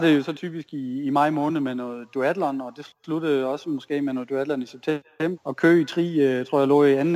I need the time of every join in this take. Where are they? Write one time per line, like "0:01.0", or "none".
0:05.4